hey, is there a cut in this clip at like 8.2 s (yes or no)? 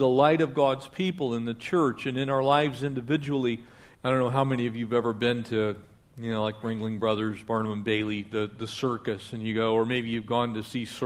no